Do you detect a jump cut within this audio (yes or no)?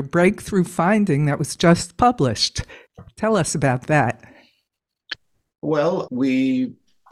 yes